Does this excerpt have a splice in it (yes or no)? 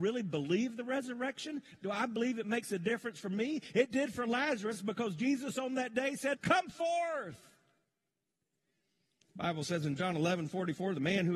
yes